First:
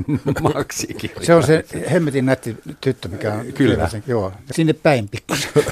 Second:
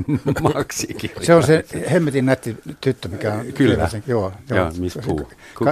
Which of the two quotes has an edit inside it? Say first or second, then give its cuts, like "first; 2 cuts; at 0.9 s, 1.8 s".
first; 1 cut; at 4.5 s